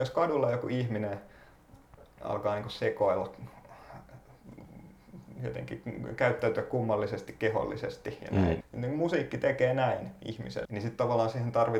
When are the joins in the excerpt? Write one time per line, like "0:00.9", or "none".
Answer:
0:08.6
0:10.6